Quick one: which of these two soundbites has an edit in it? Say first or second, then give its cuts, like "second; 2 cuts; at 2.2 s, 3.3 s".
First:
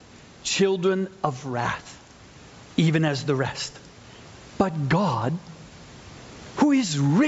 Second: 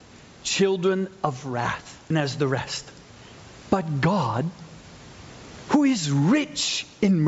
second; 1 cut; at 2.1 s